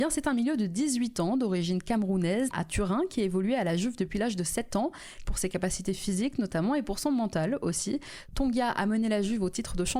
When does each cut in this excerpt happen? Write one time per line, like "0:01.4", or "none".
0:02.5
0:05.3